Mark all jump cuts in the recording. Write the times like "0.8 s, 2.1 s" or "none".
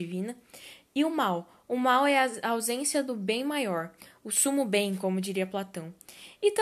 none